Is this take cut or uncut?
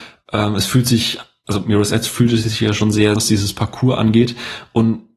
cut